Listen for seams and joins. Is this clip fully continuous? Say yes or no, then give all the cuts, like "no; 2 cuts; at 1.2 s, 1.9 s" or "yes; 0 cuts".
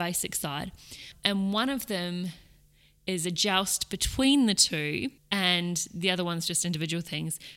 no; 1 cut; at 5.2 s